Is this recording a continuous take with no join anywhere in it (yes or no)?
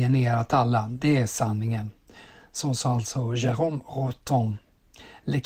yes